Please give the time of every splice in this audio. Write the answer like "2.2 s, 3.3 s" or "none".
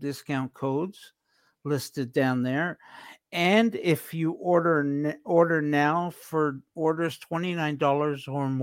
none

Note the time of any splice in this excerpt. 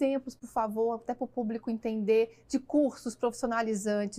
none

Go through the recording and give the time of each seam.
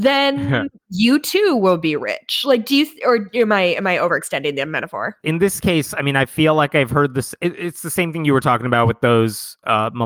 5.2 s

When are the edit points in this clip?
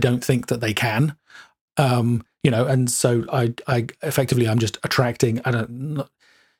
none

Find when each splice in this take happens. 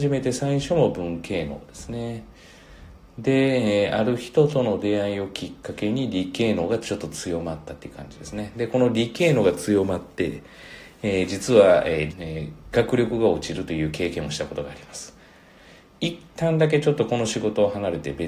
12.1 s

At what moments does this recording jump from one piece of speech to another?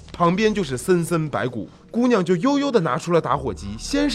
none

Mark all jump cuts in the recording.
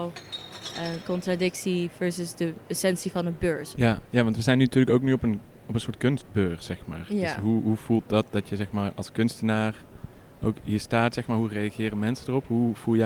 3.7 s

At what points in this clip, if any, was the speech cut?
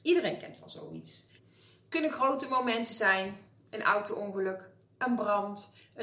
1.4 s

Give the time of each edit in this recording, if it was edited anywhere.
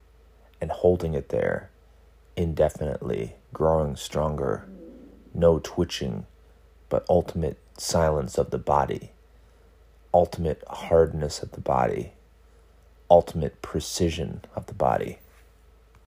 3.4 s

